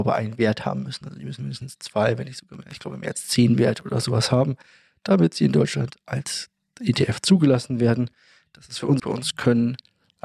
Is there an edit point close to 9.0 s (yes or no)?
yes